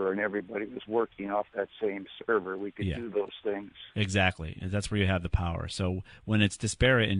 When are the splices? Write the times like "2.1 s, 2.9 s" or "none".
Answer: none